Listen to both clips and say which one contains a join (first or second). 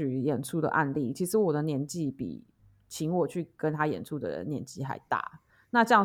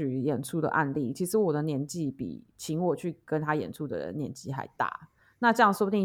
second